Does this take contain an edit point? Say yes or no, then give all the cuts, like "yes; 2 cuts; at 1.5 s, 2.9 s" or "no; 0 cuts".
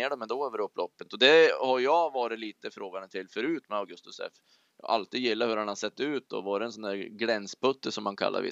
no; 0 cuts